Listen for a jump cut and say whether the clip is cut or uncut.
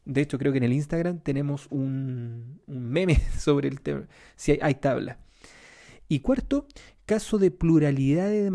uncut